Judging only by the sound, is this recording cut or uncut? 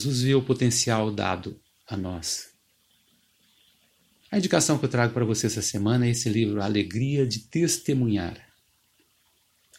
cut